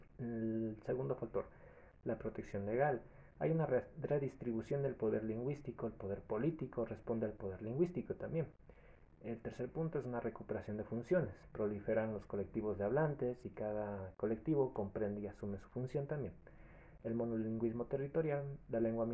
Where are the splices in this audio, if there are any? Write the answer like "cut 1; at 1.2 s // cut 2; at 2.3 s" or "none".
none